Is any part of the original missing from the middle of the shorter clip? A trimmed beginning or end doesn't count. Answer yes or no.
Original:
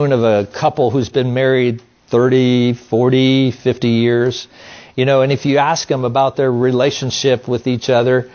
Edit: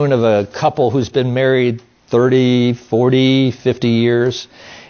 no